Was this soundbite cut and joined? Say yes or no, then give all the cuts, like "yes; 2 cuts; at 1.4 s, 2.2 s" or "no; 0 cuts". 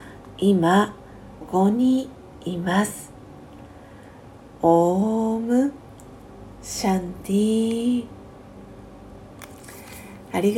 yes; 1 cut; at 1.4 s